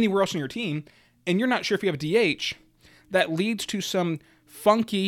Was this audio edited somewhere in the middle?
no; 0 cuts

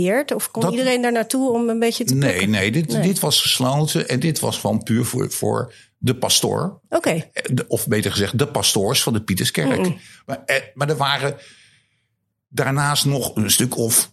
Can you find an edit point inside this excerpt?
no; 0 cuts

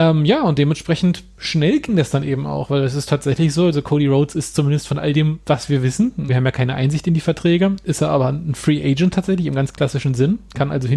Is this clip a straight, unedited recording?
no; 1 cut; at 6.3 s

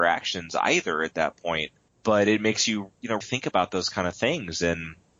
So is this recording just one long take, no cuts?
no; 2 cuts; at 1.9 s, 3.2 s

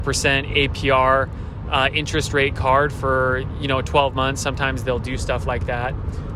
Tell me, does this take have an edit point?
no; 0 cuts

